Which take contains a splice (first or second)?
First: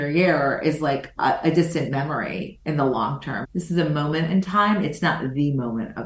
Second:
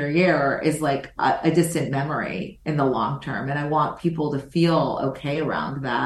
first